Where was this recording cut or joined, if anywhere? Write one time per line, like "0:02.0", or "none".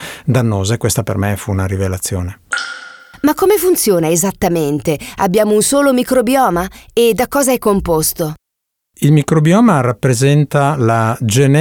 none